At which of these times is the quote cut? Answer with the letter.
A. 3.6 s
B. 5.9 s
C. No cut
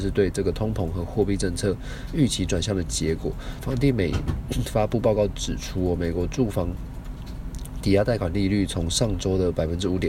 A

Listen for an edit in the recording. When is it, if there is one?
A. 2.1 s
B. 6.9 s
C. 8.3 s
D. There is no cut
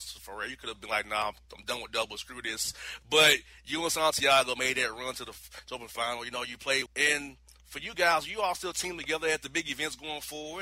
B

